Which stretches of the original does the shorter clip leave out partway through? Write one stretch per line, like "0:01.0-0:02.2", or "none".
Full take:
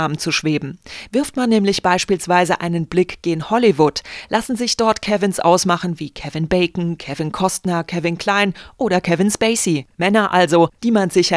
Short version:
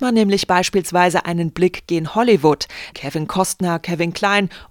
0:04.3-0:07.0